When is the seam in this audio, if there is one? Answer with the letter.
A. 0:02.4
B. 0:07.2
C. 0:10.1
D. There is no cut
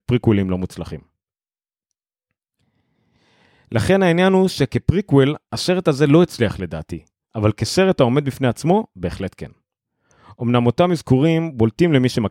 D